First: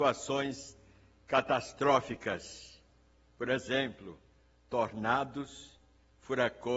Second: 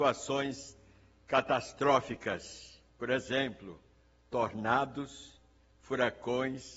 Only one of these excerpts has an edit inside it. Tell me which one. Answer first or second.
second